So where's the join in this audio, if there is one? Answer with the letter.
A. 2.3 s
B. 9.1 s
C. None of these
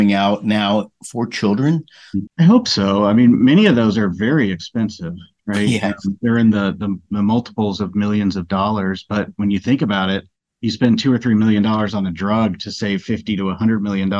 A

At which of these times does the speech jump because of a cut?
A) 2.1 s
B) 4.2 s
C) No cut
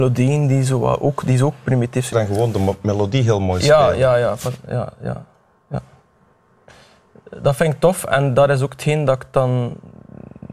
A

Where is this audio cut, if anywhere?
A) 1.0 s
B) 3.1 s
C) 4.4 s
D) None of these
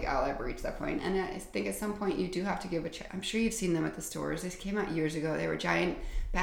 B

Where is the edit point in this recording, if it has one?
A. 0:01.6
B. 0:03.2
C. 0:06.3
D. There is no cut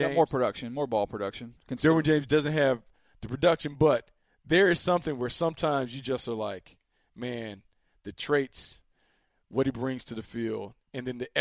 D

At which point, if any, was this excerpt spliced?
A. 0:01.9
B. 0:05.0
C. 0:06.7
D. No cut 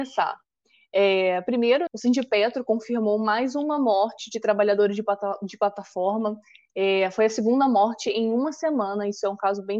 A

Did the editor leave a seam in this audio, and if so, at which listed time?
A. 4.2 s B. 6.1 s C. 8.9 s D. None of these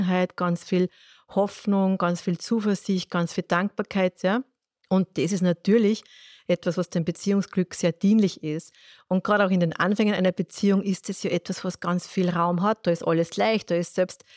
A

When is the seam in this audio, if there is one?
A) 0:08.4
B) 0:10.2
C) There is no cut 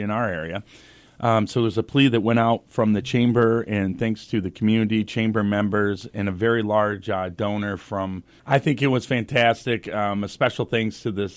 A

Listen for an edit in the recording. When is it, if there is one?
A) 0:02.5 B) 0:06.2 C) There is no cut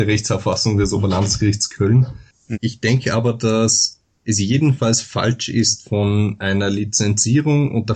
A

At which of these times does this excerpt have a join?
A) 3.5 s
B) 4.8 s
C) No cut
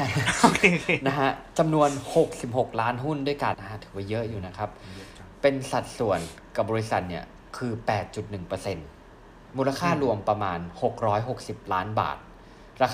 A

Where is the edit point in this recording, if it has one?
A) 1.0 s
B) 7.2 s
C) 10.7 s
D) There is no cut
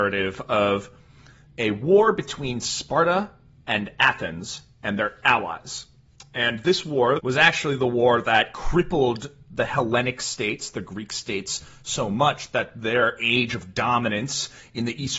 B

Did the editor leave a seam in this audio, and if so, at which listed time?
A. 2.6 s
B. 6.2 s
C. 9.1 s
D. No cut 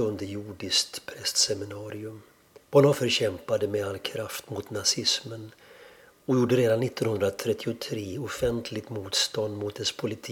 A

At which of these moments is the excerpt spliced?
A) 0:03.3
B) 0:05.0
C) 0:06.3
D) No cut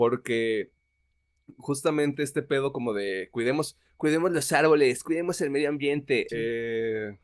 C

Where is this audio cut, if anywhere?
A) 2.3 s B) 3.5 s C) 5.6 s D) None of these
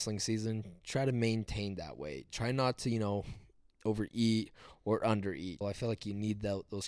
C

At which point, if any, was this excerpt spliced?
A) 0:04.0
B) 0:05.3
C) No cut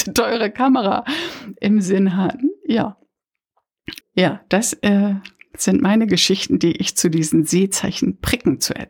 A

